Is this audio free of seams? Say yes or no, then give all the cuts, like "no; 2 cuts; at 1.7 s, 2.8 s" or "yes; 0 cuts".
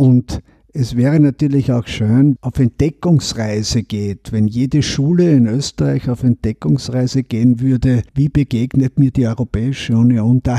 no; 2 cuts; at 2.4 s, 8.1 s